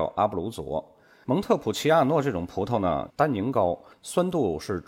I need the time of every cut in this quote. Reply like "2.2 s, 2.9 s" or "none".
1.2 s, 3.1 s